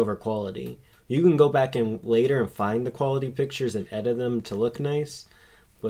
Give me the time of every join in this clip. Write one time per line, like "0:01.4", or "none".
none